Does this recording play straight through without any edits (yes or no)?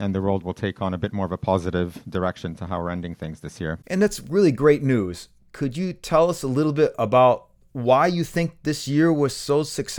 yes